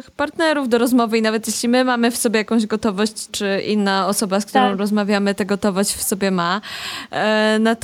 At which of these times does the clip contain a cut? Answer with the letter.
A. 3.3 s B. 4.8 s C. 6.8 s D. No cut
A